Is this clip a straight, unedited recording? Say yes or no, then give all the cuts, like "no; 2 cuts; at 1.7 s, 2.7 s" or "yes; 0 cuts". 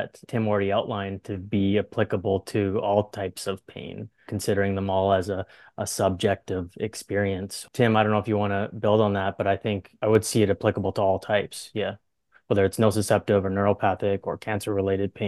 yes; 0 cuts